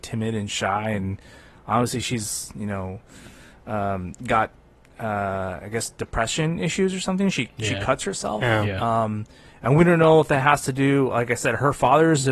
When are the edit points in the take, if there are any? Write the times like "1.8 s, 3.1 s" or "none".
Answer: none